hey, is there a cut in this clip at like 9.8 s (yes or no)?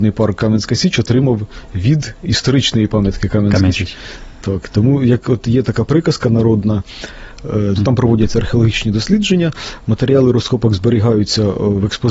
no